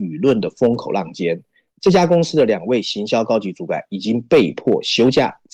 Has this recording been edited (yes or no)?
no